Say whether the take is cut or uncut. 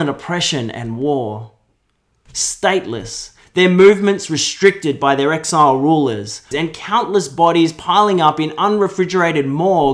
cut